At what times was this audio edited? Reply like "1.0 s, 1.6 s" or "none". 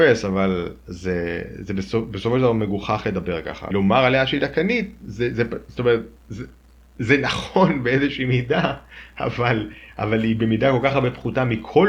3.7 s